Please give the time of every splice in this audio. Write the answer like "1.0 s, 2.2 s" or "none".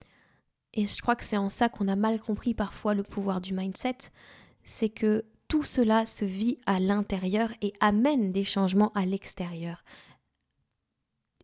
none